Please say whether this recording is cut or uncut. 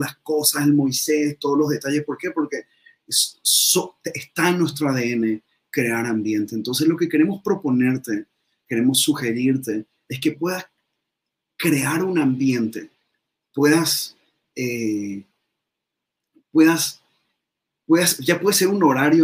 uncut